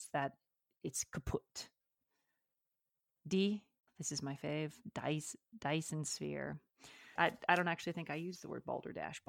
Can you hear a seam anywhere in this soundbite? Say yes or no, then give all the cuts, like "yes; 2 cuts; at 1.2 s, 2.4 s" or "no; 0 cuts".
yes; 2 cuts; at 3.9 s, 7.2 s